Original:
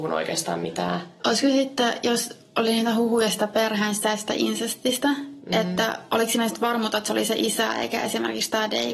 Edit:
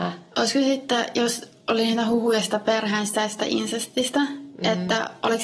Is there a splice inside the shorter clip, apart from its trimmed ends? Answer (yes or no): no